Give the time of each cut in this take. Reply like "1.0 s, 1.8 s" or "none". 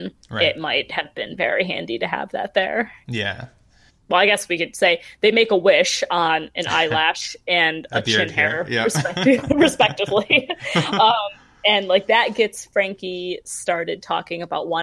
3.9 s